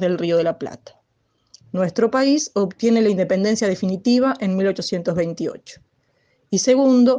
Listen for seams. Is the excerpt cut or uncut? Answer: cut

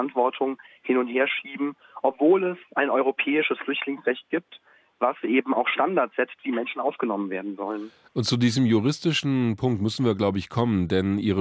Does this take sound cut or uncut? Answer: uncut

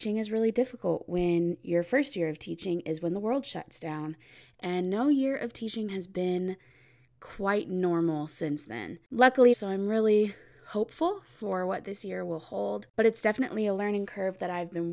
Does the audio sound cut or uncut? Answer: cut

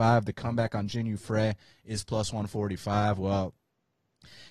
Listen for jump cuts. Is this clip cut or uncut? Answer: uncut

